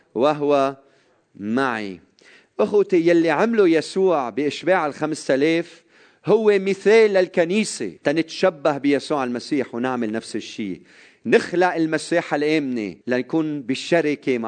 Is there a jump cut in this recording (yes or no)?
yes